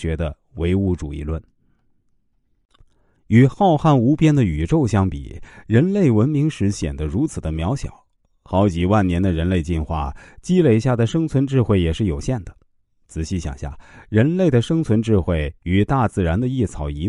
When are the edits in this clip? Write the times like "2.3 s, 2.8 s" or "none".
none